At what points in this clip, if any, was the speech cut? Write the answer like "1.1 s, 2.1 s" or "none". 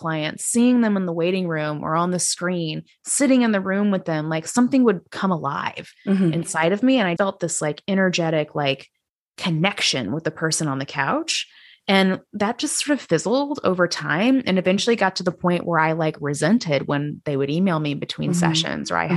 7.2 s